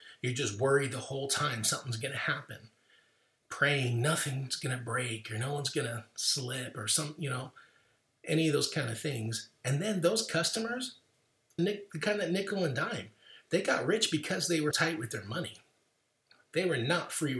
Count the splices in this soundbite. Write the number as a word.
two